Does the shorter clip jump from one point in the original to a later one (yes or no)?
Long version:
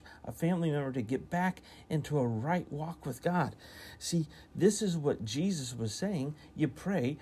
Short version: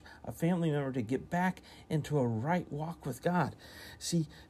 no